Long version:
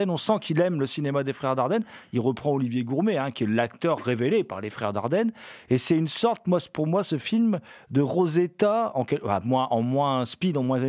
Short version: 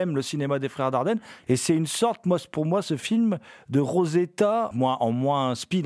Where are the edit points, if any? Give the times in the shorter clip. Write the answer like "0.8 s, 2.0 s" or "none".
1.4 s, 4.7 s